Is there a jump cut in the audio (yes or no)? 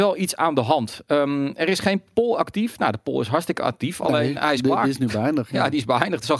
no